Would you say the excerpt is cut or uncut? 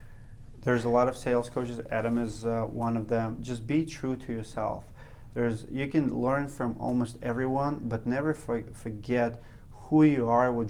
uncut